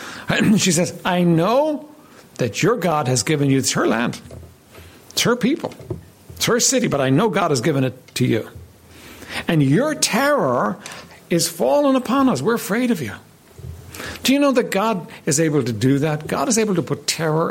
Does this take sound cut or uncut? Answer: uncut